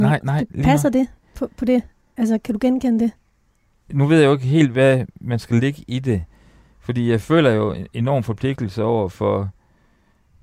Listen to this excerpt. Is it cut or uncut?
uncut